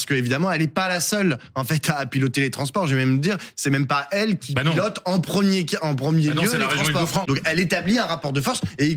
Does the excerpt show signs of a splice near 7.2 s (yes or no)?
yes